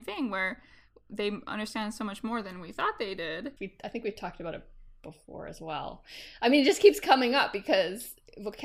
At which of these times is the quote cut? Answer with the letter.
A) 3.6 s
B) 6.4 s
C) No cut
A